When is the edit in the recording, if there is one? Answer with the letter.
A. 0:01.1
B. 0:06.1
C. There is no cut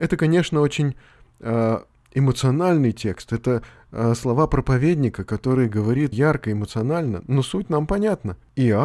B